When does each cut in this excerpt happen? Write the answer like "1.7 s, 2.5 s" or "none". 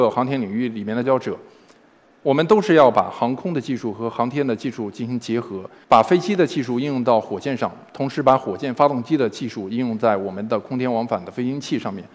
1.0 s, 5.8 s